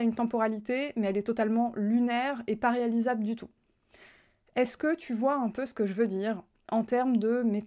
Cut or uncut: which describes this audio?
uncut